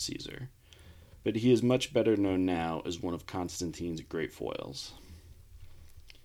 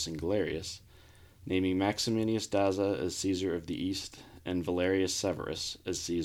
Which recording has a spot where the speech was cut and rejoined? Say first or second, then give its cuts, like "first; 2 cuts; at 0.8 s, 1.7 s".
second; 1 cut; at 1.4 s